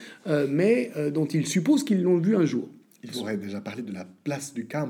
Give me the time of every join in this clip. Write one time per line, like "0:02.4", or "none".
none